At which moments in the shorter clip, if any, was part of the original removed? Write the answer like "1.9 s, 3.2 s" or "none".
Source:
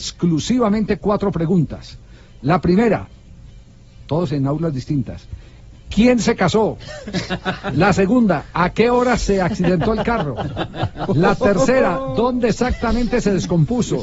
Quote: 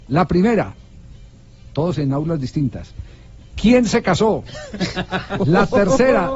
5.4 s